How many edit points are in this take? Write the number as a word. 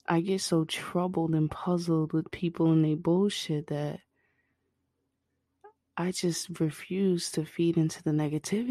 zero